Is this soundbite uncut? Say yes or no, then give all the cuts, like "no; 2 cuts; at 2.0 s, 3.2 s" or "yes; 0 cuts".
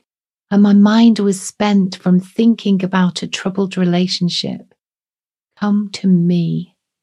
no; 1 cut; at 5.4 s